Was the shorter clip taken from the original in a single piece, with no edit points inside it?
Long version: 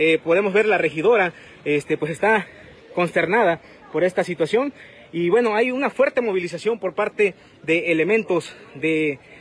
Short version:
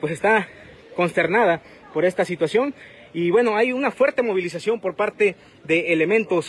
yes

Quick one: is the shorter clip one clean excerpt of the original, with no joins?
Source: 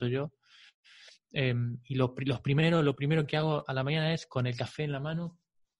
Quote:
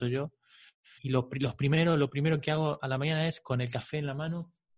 no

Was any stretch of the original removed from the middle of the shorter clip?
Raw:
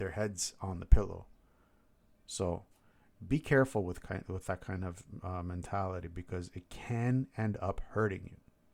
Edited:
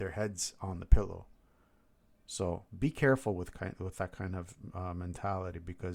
yes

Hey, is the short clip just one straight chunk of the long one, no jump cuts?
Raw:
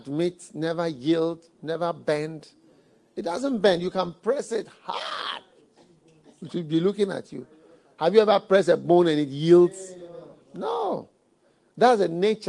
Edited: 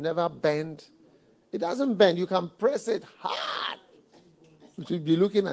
yes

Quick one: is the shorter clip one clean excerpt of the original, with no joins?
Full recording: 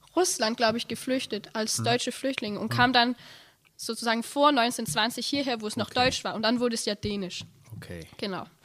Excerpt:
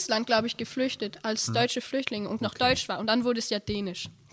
no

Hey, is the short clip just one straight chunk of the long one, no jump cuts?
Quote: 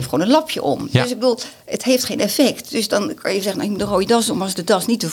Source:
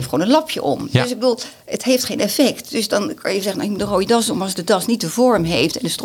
yes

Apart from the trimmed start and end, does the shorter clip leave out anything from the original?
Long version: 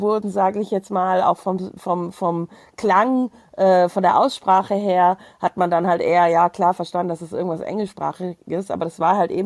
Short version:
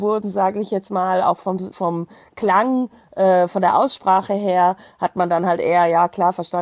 yes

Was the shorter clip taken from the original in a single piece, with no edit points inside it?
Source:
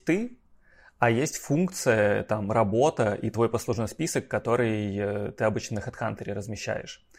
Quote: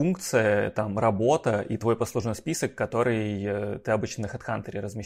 yes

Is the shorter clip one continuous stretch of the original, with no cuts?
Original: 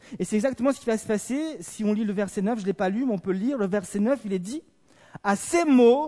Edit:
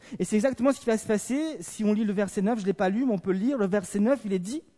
yes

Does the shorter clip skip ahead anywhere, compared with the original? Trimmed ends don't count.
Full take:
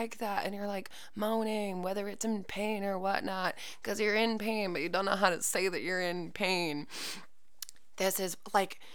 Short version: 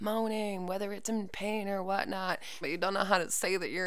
yes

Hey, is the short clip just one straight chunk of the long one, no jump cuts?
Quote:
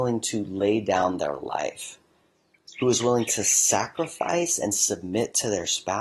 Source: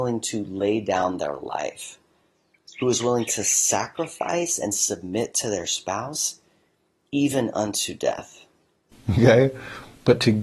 yes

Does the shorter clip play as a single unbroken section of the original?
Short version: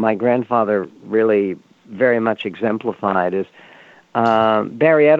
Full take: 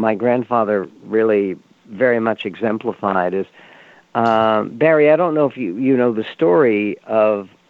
yes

